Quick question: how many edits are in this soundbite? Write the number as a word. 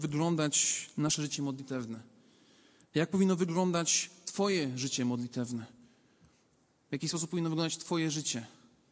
zero